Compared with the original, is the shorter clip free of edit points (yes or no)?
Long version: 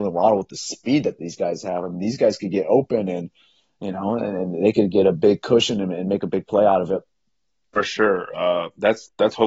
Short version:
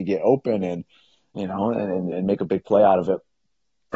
no